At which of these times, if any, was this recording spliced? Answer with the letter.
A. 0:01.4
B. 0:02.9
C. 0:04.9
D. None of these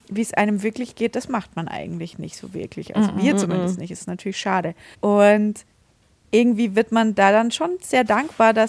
C